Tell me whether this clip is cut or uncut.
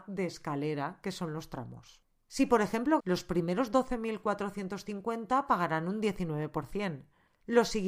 cut